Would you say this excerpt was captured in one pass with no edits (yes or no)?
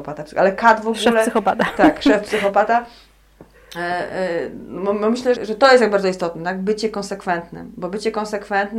no